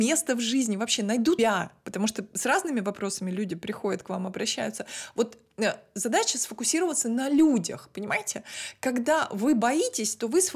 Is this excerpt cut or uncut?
cut